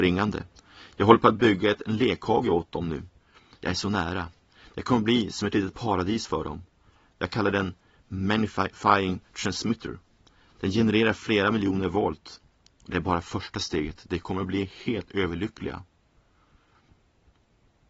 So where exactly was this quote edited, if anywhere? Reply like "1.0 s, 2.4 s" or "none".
none